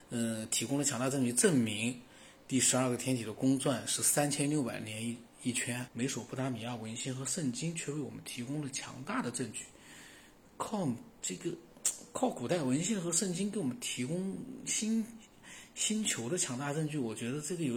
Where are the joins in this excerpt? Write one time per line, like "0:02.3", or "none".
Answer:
0:05.9